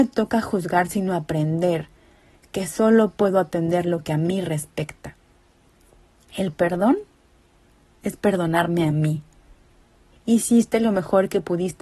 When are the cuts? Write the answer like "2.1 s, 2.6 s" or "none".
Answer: 10.1 s

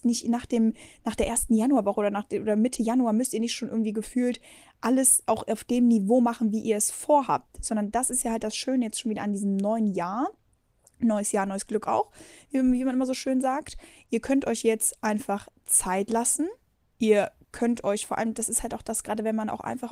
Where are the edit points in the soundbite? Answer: none

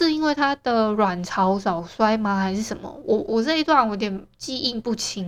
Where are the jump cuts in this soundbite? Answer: 3.3 s

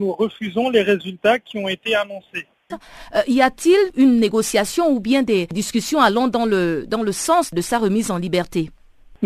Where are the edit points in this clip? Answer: 2.7 s

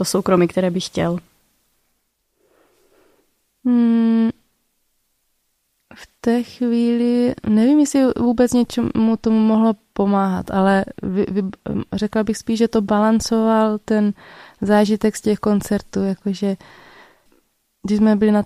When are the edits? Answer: none

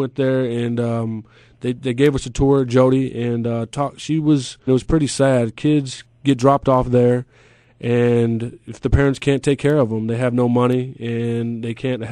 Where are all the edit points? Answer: 4.7 s

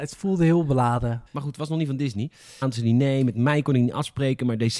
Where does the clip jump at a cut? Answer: 1.3 s, 2.6 s

